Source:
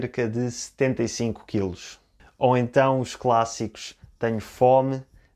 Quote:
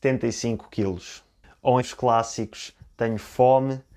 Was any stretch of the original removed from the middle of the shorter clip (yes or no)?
yes